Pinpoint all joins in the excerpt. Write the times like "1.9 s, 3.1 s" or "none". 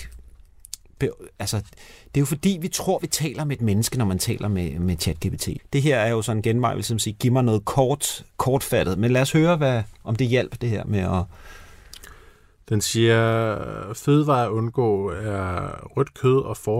5.6 s

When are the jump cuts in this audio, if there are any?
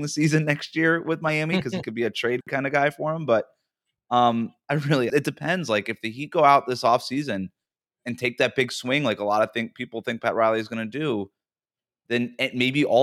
5.1 s

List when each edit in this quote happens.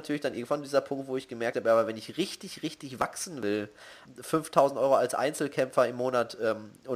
4.1 s

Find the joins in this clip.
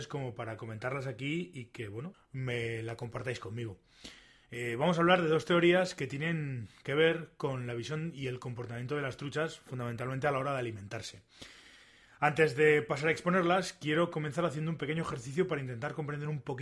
2.1 s

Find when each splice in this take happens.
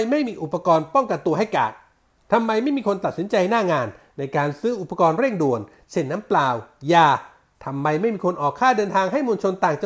none

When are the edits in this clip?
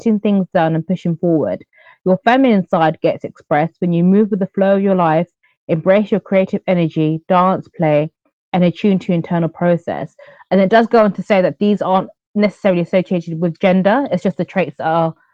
none

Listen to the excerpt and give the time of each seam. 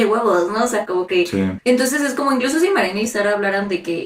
1.6 s

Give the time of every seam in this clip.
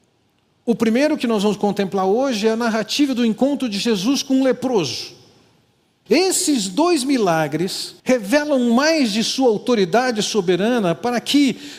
6.1 s, 8.0 s

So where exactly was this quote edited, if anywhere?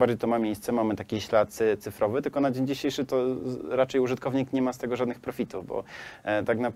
none

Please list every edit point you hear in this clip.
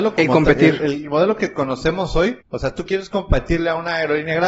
2.4 s

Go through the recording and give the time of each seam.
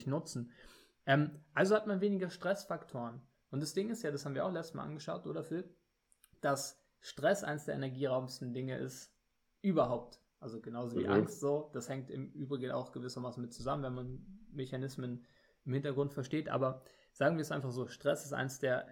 none

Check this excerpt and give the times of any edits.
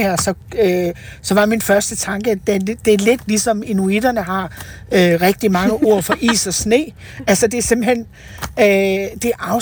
none

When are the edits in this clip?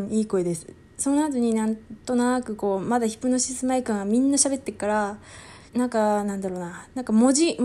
5.7 s

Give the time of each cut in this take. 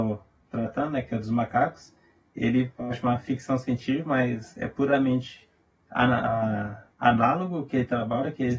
6.9 s

